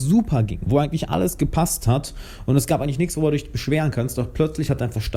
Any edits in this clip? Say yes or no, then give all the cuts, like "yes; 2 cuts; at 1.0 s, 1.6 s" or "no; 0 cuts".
no; 0 cuts